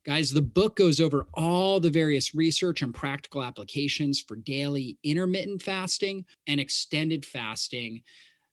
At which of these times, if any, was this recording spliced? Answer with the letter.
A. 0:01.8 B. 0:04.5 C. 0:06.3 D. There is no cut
C